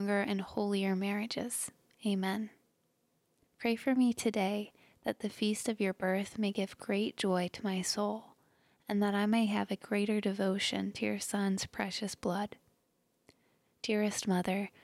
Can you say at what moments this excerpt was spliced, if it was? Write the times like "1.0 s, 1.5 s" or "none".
3.5 s